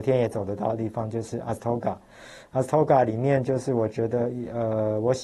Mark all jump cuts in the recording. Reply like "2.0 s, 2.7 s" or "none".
none